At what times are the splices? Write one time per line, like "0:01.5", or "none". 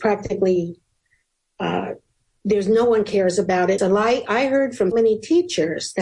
0:03.8
0:04.9